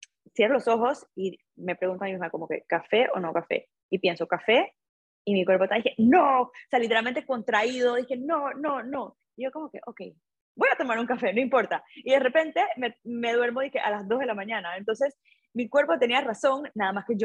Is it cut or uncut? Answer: uncut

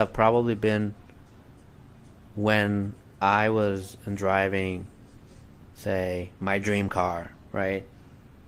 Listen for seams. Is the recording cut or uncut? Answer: uncut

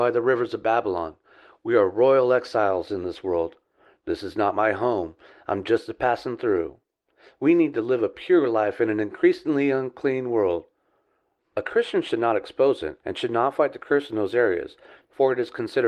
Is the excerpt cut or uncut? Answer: cut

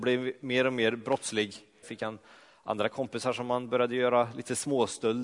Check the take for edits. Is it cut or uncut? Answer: cut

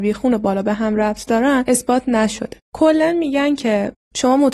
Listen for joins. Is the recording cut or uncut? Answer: cut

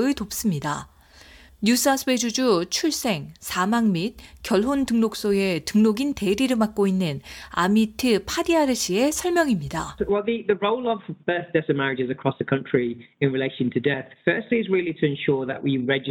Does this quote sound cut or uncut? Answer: uncut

